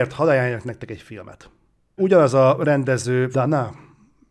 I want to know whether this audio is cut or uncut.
cut